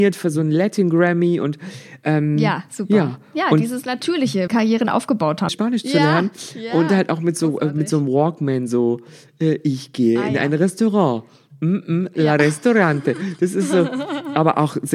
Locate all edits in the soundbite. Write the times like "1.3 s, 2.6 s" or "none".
4.5 s, 5.5 s